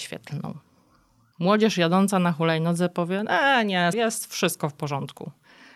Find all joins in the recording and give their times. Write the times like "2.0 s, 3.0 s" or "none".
1.3 s, 3.9 s